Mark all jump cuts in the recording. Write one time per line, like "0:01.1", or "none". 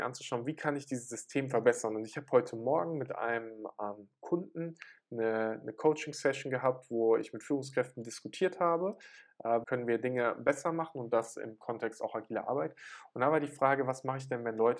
0:09.6